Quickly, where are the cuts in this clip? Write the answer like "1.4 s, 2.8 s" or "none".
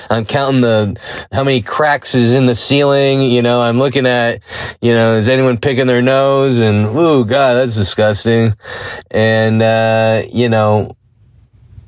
none